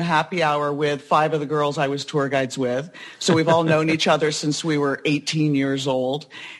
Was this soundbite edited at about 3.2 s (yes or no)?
no